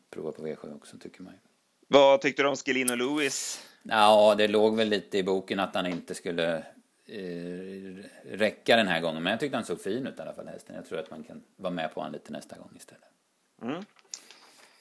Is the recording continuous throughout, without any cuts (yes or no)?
no